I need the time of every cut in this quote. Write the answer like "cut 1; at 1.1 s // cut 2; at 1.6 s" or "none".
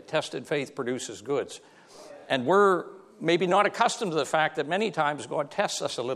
none